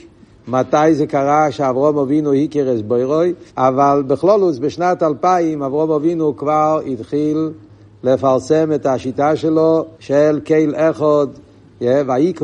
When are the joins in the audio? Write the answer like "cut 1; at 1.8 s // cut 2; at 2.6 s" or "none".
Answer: cut 1; at 3.5 s // cut 2; at 9.9 s